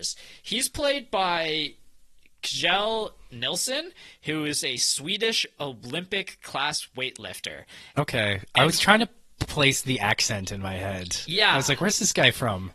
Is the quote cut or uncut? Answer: uncut